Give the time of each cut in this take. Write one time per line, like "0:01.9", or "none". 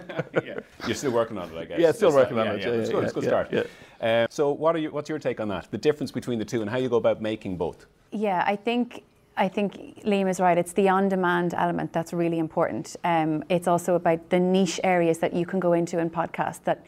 0:04.3